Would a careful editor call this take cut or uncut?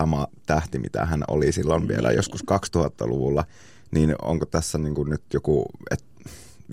uncut